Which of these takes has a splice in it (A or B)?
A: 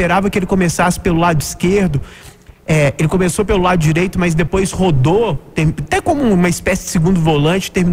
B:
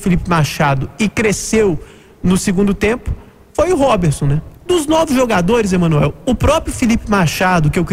B